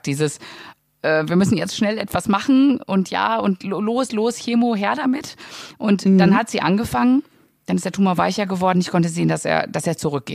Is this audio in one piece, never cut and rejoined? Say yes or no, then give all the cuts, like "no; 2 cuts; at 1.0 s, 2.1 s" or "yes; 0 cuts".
yes; 0 cuts